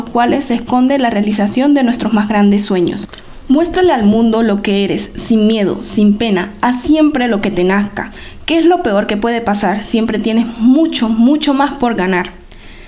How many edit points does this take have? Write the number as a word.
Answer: zero